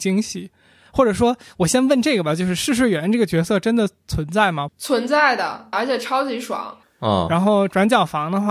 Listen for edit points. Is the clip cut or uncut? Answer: cut